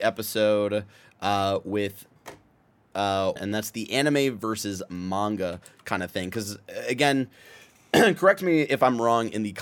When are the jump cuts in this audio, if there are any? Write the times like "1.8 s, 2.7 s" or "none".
3.4 s